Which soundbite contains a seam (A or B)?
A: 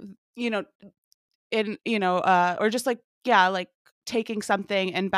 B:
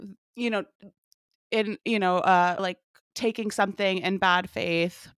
B